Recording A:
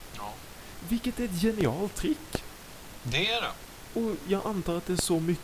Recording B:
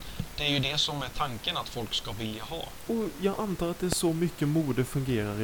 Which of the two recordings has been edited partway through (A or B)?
B